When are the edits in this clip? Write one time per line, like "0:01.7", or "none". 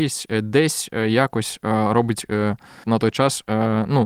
0:02.8